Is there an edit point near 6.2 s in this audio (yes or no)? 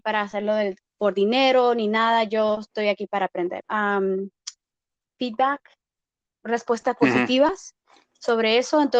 yes